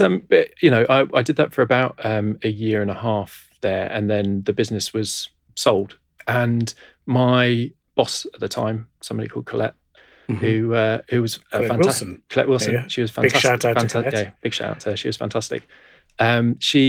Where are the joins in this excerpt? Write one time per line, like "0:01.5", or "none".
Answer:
none